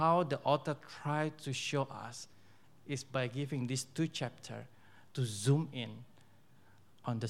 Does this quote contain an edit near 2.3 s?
no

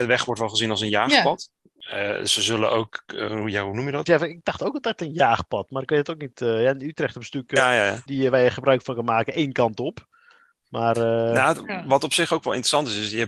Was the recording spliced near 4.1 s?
yes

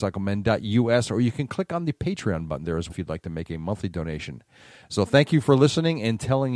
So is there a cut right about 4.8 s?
no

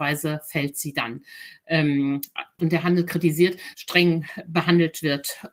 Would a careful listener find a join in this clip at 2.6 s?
yes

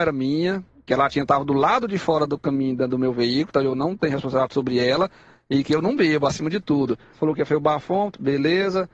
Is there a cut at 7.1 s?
yes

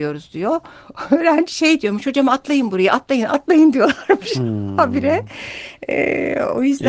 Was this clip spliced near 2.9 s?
no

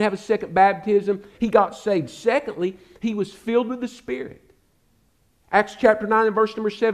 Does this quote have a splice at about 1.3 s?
yes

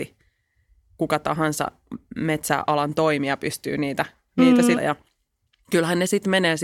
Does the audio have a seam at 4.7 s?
yes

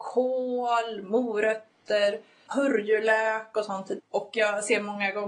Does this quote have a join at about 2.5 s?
yes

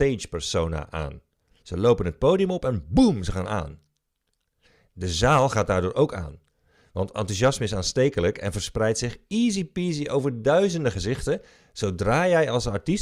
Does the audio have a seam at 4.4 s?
no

